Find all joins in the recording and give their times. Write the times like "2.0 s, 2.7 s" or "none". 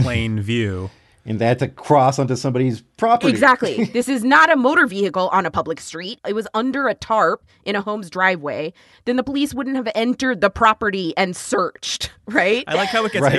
8.9 s

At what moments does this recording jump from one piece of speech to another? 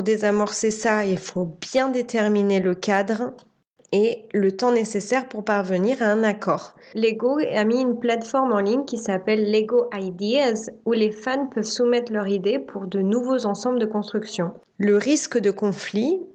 6.9 s, 14.7 s

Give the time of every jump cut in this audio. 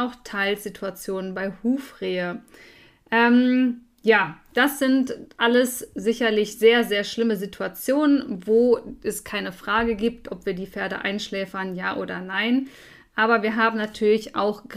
none

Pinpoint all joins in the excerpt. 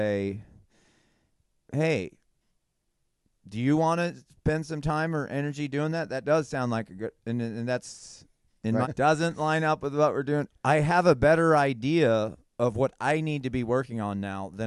8.8 s, 10.5 s

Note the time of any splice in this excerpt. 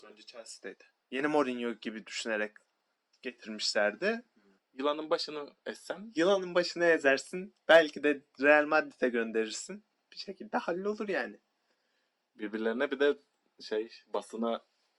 1.0 s, 4.6 s

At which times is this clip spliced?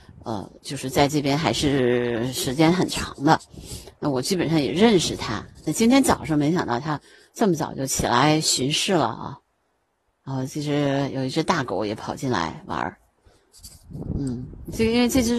none

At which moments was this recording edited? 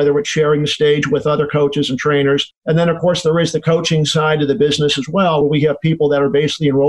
none

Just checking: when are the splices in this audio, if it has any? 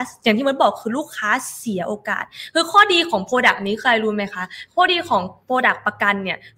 none

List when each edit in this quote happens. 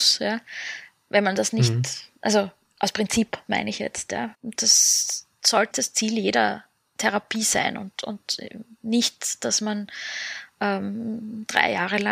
4.3 s, 5.7 s

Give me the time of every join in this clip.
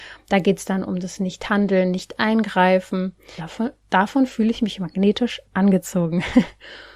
3.4 s

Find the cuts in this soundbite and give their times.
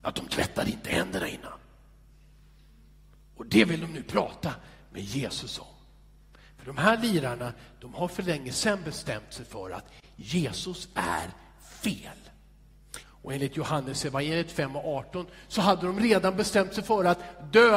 13.0 s

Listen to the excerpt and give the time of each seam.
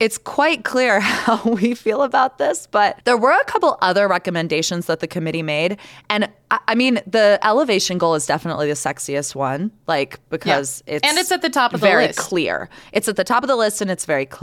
none

